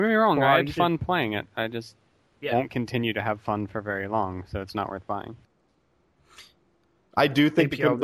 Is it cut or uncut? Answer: uncut